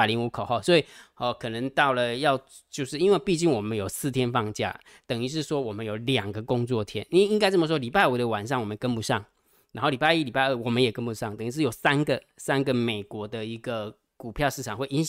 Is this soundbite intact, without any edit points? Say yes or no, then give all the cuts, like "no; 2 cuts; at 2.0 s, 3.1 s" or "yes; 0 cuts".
yes; 0 cuts